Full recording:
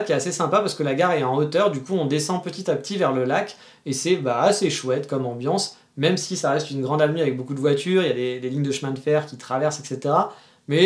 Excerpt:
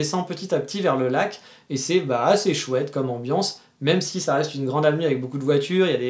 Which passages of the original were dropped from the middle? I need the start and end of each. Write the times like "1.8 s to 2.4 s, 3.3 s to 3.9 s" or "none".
none